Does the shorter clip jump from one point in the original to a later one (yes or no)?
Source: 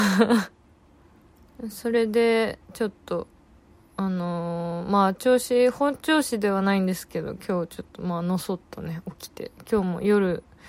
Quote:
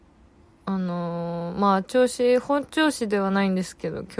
no